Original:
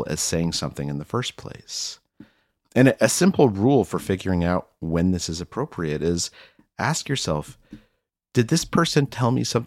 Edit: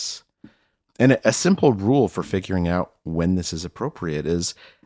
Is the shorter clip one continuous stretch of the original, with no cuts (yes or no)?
yes